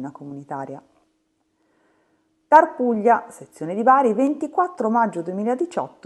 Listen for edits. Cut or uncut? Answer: uncut